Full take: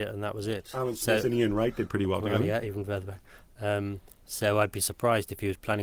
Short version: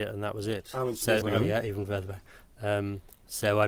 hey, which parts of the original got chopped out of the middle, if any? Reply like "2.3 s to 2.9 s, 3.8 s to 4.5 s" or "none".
1.2 s to 2.2 s